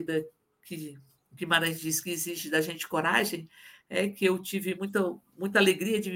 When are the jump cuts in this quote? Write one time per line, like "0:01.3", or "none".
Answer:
none